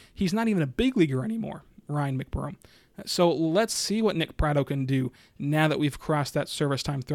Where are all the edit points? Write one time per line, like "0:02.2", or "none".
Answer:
none